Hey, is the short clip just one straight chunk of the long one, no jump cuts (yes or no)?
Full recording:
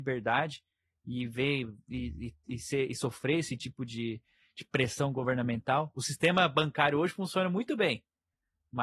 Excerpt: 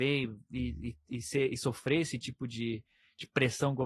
yes